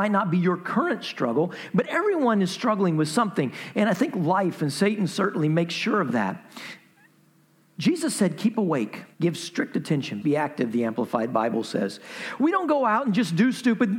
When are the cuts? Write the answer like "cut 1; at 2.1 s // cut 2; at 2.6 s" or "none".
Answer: cut 1; at 9.1 s // cut 2; at 10.2 s // cut 3; at 12.4 s